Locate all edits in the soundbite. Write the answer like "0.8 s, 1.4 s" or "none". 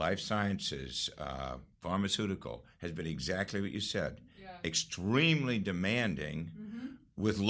1.7 s